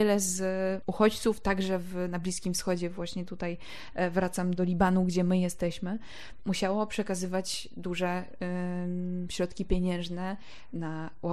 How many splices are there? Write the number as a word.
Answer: two